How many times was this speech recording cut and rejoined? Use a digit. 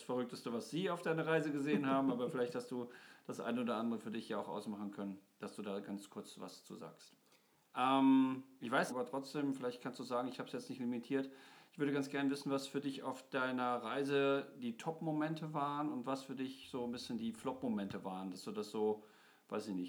2